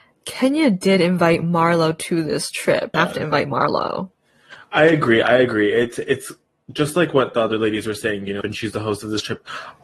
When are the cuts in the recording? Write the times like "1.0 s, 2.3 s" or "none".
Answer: 2.9 s, 8.4 s